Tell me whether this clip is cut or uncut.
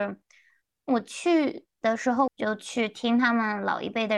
cut